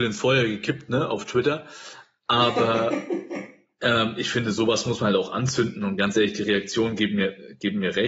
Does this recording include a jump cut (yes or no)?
no